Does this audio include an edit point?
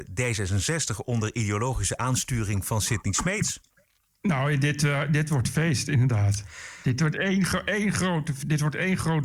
no; 0 cuts

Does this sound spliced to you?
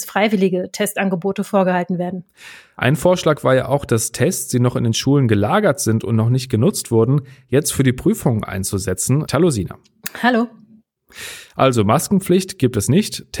yes; 1 cut; at 9.3 s

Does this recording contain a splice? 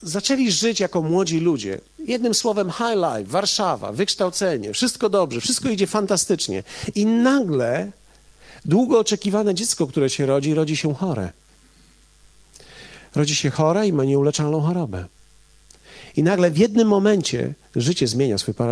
no; 0 cuts

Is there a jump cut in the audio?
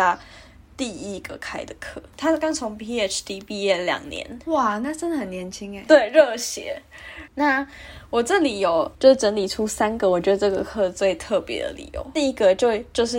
yes; 2 cuts; at 5.9 s, 7.3 s

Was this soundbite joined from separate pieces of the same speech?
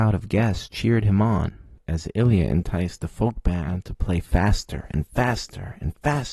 no; 0 cuts

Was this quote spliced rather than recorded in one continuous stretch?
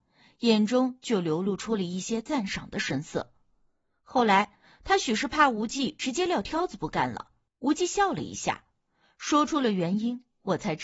yes; 1 cut; at 7.5 s

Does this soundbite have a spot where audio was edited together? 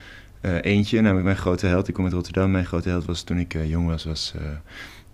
no; 0 cuts

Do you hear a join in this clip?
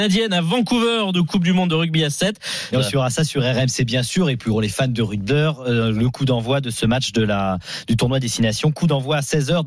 yes; 2 cuts; at 2.7 s, 5.3 s

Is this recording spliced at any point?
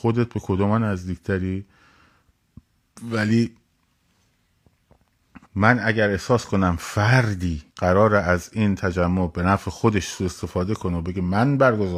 yes; 2 cuts; at 5.4 s, 7.7 s

